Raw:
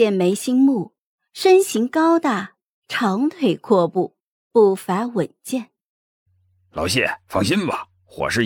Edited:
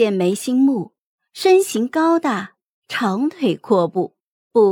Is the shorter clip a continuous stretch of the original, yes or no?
yes